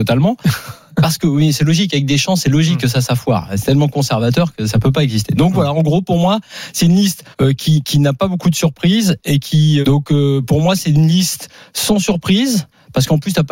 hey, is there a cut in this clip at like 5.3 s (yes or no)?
no